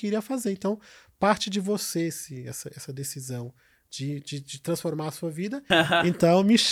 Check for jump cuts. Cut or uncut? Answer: cut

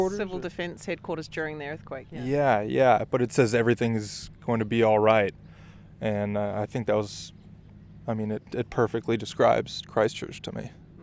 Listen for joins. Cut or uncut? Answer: uncut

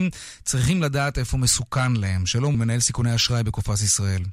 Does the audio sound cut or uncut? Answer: cut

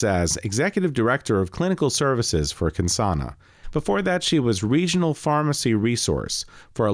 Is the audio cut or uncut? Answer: cut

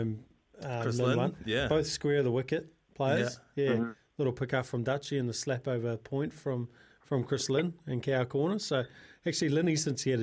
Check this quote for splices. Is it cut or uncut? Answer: uncut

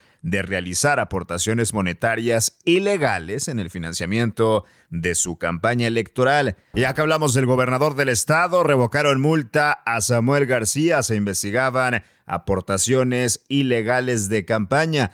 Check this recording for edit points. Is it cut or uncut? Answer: cut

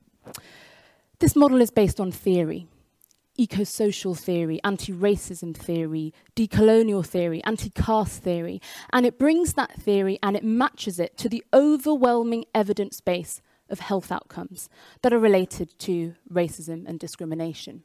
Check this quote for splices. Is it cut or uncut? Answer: uncut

